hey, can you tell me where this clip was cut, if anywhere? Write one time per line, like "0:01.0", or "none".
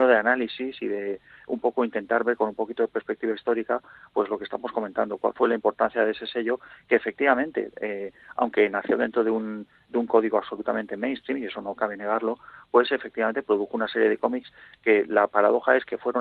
none